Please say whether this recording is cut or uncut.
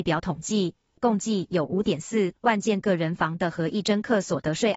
cut